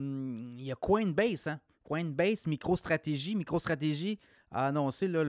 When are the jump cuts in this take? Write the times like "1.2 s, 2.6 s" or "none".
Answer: none